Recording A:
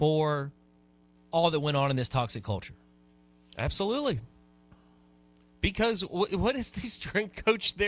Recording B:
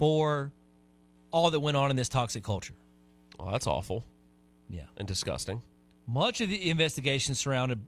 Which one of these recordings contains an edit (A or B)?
B